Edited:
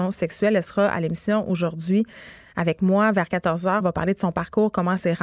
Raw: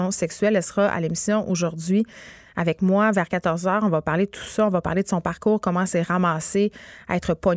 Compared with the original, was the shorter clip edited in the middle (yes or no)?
yes